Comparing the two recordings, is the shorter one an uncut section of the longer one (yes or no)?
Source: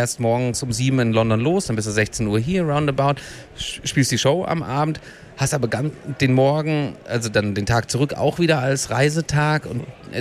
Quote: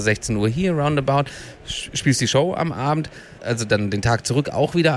no